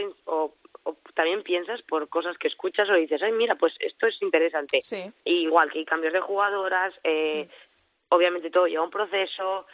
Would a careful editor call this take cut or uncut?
cut